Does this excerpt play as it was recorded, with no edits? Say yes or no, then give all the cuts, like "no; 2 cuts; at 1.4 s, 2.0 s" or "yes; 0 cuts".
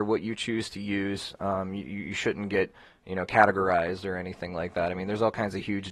yes; 0 cuts